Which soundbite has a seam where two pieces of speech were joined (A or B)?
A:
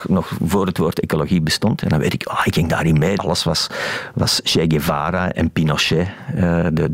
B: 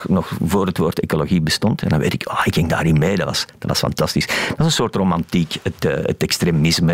A